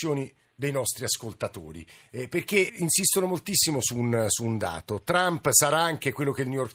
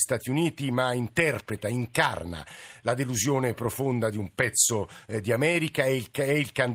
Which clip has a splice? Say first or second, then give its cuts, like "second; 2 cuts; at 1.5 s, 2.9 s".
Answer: first; 1 cut; at 2.7 s